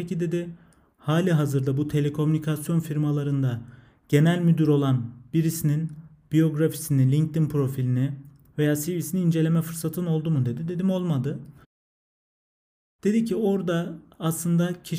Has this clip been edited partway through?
no; 0 cuts

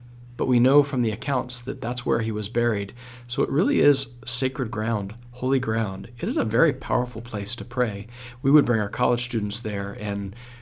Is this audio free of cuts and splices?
yes; 0 cuts

